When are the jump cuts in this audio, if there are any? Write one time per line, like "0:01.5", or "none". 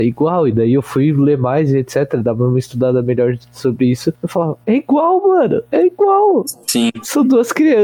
none